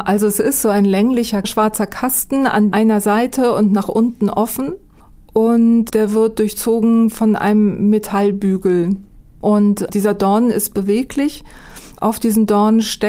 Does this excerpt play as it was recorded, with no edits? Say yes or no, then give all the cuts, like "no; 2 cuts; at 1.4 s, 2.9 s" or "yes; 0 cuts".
yes; 0 cuts